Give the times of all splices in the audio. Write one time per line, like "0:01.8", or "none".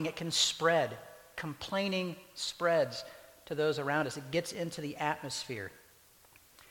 none